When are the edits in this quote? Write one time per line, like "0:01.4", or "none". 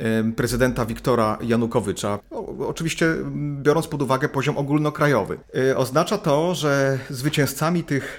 0:02.2

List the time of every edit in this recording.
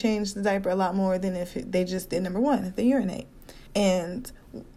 0:03.7

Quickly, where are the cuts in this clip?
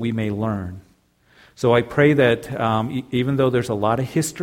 none

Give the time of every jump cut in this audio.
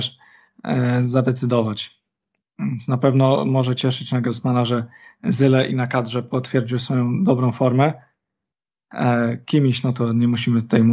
none

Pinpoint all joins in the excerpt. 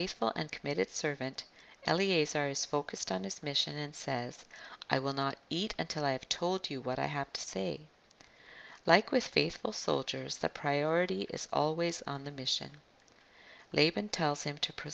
none

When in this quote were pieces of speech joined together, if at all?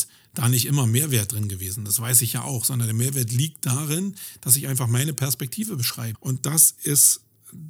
0:06.1

